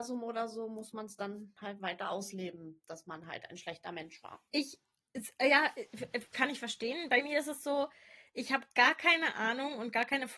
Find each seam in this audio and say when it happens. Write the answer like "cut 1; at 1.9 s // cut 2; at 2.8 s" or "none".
cut 1; at 4.5 s